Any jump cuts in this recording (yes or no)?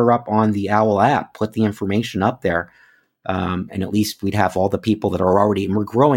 no